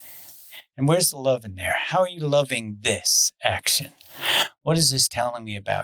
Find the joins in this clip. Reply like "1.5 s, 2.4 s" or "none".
none